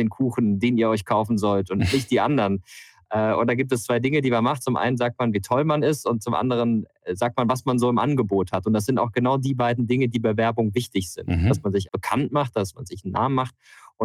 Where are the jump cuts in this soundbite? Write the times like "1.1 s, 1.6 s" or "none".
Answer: 11.8 s